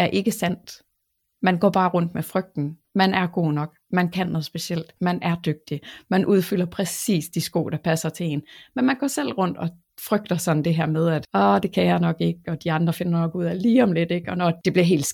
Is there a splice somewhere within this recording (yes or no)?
no